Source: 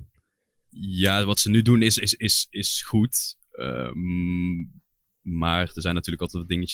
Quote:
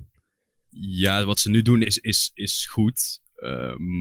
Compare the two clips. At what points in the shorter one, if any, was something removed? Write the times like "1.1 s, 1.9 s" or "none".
1.8 s